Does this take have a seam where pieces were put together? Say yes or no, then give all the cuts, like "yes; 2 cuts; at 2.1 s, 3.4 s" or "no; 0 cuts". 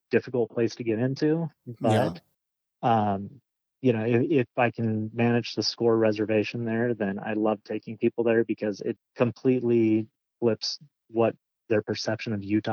yes; 1 cut; at 9.0 s